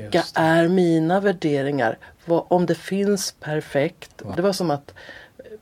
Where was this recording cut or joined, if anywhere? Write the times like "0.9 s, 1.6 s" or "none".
4.3 s